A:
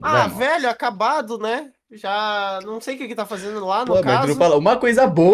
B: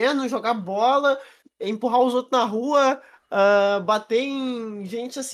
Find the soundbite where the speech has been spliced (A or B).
B